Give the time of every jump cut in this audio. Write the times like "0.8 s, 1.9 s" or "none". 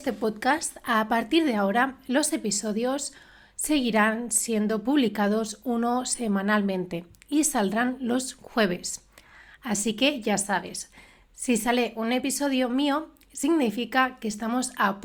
none

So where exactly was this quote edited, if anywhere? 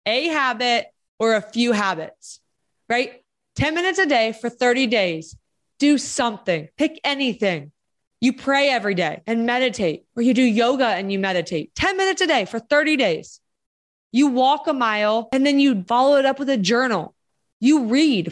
10.1 s

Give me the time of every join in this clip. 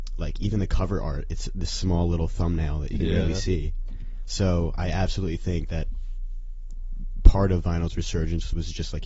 none

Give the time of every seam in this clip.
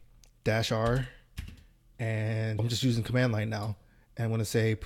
2.6 s

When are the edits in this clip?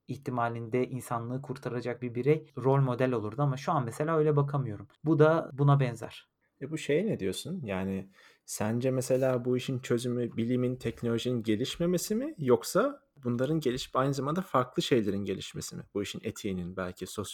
none

